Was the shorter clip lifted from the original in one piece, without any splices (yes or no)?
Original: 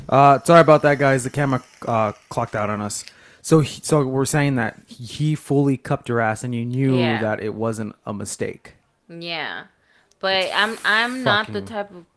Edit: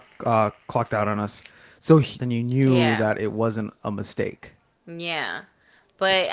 no